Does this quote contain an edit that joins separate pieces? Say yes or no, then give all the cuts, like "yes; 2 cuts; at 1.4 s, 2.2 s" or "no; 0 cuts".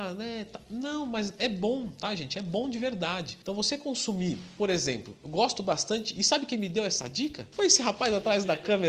no; 0 cuts